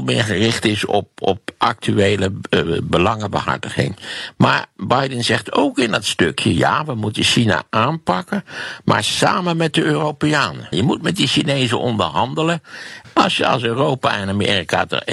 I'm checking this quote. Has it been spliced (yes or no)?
yes